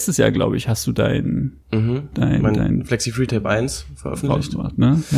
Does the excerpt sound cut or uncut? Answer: cut